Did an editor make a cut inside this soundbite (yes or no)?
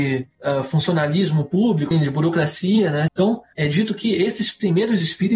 yes